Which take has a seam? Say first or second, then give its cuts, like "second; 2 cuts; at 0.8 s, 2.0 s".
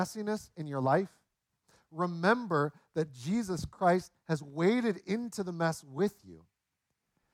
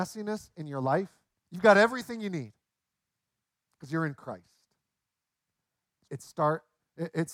second; 2 cuts; at 1.3 s, 6.1 s